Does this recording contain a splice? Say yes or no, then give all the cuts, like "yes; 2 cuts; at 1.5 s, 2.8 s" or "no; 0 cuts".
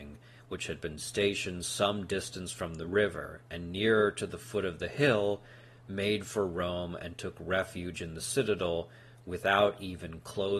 no; 0 cuts